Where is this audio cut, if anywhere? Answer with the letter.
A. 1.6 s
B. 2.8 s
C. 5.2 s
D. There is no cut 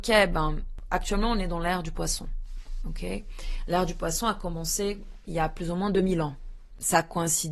D